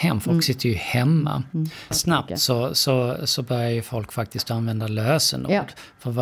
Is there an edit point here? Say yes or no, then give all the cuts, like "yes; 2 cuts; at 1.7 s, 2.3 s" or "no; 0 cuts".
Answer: yes; 1 cut; at 1.9 s